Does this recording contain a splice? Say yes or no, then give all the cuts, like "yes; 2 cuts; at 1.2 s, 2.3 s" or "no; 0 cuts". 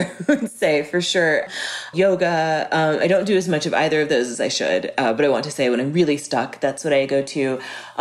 yes; 1 cut; at 1.9 s